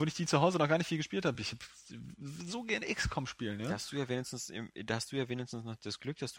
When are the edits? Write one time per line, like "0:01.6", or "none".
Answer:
none